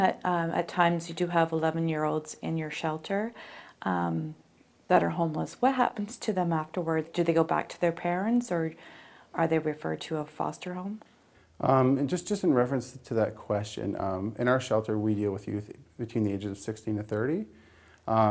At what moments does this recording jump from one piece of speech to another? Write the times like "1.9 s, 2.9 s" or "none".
none